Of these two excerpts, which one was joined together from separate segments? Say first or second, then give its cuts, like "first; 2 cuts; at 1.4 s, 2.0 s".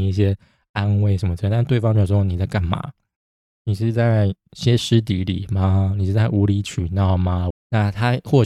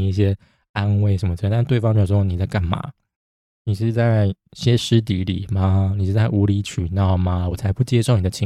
first; 1 cut; at 7.5 s